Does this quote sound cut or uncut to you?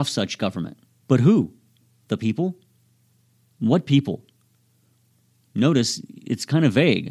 cut